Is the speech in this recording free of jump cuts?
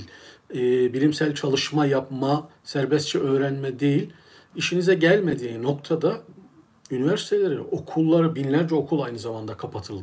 yes; 0 cuts

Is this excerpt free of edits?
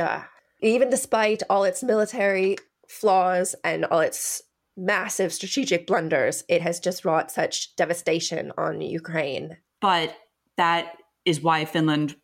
no; 1 cut; at 9.8 s

